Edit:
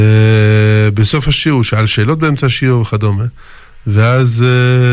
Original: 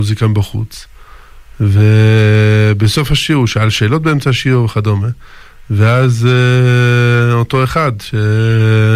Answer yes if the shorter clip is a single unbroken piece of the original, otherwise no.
yes